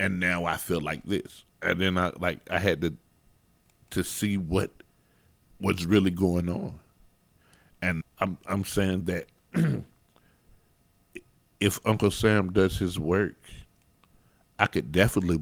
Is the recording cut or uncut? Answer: cut